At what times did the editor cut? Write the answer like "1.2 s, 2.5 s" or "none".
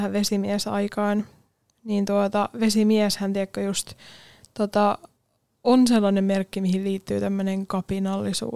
none